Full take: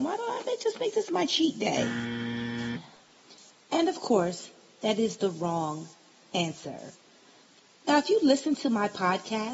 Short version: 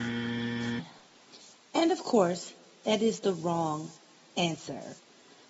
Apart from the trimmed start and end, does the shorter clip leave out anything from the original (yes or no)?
no